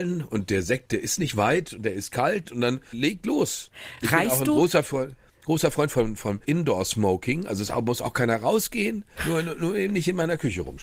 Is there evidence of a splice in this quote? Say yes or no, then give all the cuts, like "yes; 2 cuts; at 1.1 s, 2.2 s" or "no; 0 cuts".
no; 0 cuts